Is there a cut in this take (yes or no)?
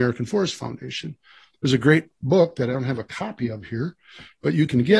no